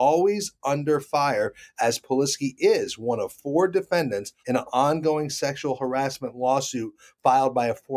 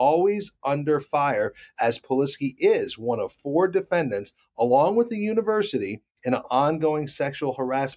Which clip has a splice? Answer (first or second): first